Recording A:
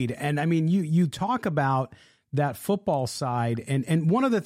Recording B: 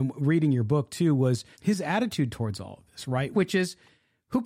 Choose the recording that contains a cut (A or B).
B